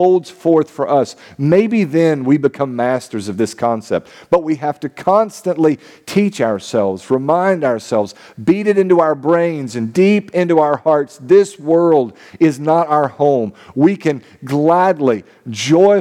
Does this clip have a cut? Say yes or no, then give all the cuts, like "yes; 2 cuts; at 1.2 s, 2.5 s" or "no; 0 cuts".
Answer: no; 0 cuts